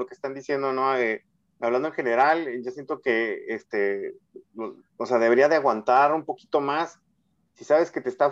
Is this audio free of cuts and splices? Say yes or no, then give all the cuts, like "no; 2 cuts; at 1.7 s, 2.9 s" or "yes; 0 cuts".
yes; 0 cuts